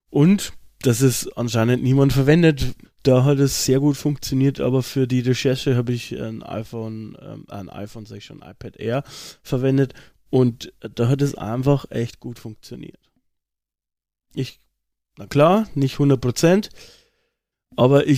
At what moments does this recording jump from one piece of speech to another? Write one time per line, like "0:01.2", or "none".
0:02.8